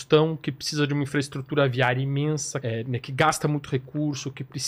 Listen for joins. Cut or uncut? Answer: cut